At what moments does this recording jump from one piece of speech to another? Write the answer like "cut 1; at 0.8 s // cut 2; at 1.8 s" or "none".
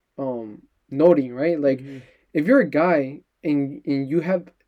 none